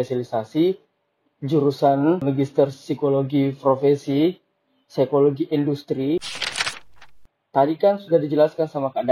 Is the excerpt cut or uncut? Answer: uncut